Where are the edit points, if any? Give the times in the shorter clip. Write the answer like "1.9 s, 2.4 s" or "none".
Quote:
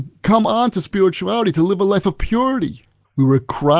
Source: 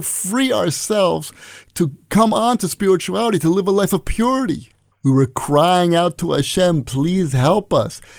none